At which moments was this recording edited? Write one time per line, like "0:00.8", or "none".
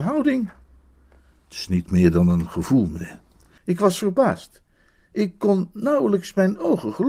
0:03.6